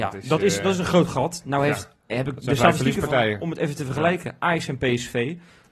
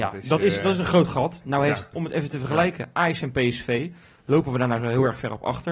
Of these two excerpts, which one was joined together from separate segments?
second; 1 cut; at 1.9 s

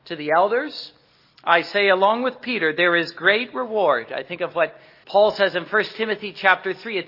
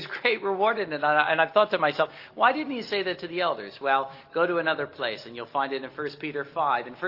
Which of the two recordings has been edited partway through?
first; 1 cut; at 5.0 s

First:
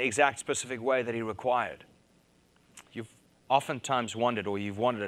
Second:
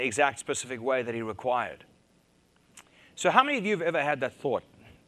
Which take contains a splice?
first; 1 cut; at 2.9 s

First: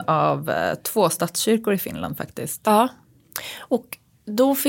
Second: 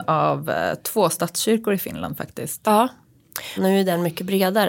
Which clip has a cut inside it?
second; 1 cut; at 3.6 s

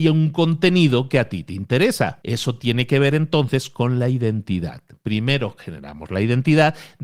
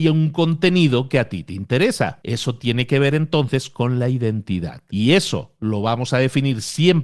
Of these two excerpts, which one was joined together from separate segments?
second; 1 cut; at 4.9 s

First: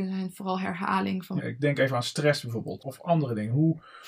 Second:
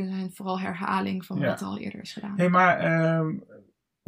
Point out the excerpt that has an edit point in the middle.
first; 2 cuts; at 1.4 s, 2.8 s

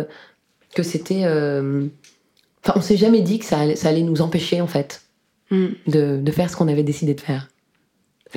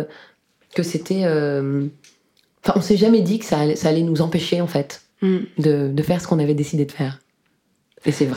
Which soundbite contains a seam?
second; 1 cut; at 5.1 s

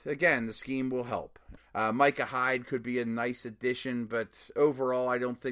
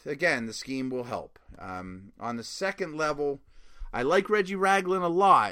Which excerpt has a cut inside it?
first; 1 cut; at 1.6 s

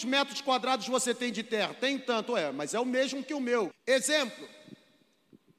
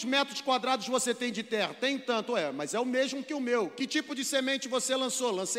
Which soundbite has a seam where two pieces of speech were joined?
first; 1 cut; at 3.7 s

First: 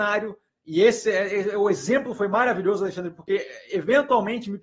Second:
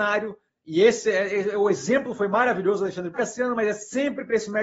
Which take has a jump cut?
second; 1 cut; at 3.1 s

